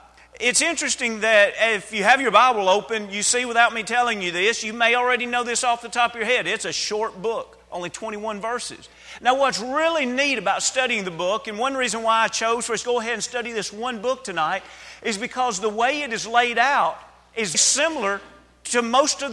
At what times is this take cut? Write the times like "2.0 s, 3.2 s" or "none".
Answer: 9.2 s, 12.8 s, 17.5 s

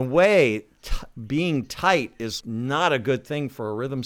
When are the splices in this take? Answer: 2.4 s

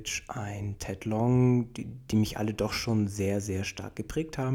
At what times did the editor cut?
none

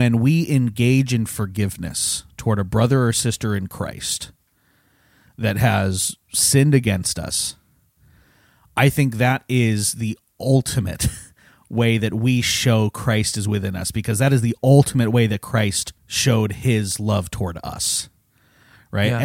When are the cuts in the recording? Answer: 16.0 s

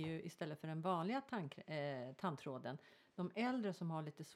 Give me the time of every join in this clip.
none

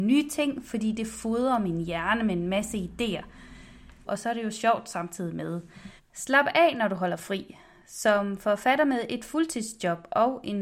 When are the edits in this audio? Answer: 4.1 s, 6.0 s

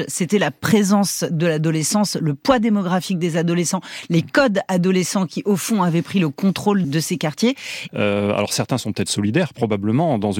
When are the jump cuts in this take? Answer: 6.8 s, 7.9 s

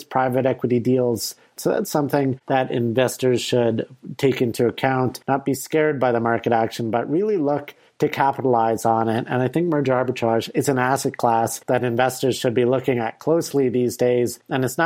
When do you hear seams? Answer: 1.6 s

